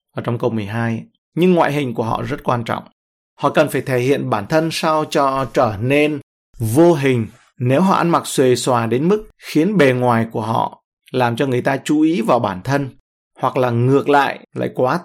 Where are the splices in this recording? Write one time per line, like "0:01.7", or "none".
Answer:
0:01.2

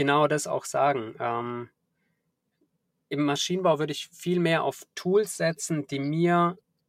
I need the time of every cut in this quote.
none

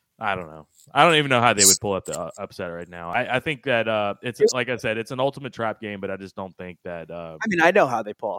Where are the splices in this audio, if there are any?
none

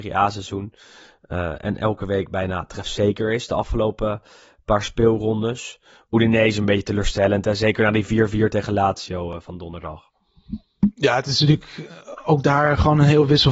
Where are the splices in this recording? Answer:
none

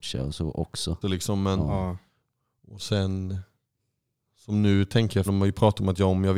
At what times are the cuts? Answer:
0:01.0
0:05.3

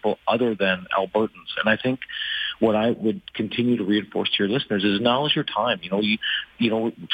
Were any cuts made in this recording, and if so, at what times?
none

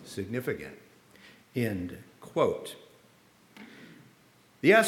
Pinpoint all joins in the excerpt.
none

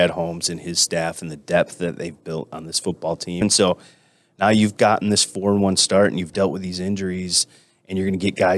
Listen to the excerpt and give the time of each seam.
0:03.4

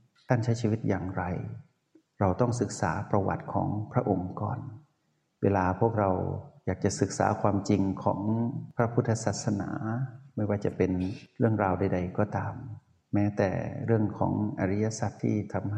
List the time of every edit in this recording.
none

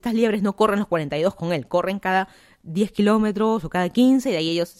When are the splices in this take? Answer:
none

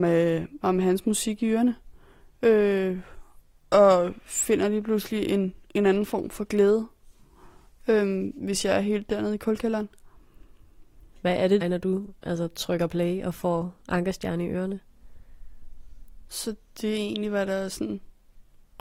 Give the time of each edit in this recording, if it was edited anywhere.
0:11.6
0:16.3

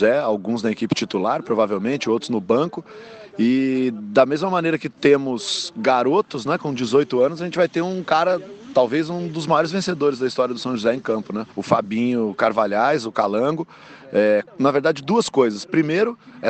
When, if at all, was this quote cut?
0:11.5
0:14.5

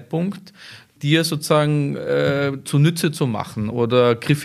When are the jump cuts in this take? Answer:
0:01.0
0:02.6

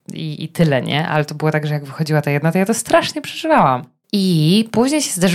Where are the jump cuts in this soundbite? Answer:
0:04.0

